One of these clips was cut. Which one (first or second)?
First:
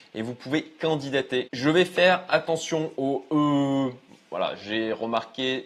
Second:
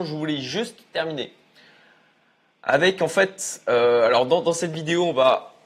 first